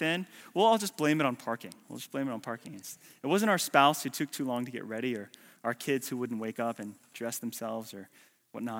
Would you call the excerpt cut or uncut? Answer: uncut